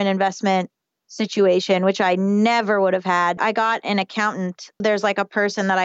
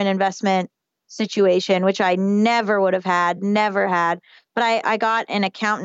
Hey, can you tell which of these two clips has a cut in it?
first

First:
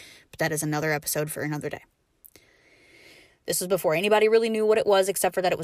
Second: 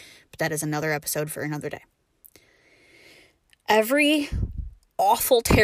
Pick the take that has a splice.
first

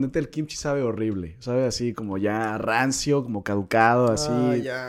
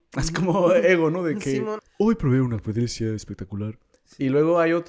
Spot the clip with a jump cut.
second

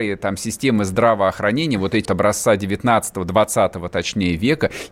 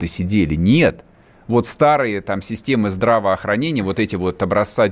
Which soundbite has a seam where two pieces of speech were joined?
first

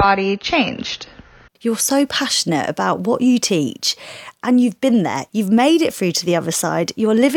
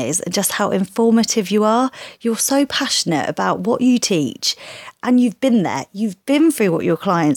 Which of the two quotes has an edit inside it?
first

